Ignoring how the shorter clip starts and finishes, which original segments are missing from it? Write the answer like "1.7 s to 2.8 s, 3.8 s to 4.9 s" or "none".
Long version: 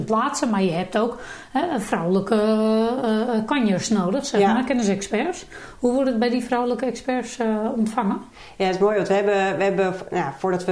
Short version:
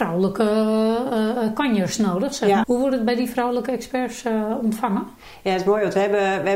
4.5 s to 5.8 s